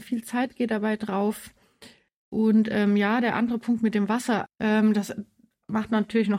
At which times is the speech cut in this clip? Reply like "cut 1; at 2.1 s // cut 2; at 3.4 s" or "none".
cut 1; at 2.1 s // cut 2; at 4.5 s